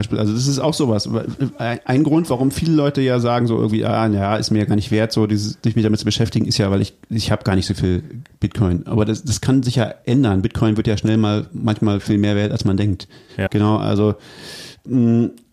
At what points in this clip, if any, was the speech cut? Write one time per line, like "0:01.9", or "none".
0:13.5